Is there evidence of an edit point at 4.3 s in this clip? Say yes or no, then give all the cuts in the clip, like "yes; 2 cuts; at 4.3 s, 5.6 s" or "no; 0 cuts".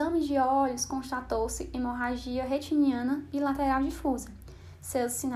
no; 0 cuts